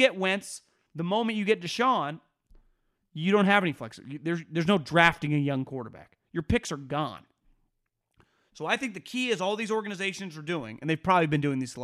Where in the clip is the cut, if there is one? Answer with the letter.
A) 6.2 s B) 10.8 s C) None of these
C